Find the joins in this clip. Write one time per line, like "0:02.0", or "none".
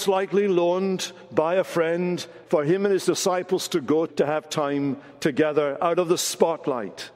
0:02.4
0:04.1